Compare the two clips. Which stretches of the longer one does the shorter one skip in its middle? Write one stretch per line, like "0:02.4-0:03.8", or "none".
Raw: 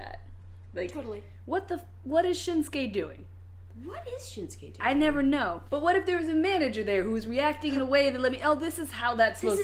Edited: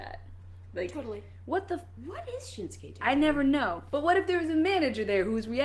0:02.0-0:03.8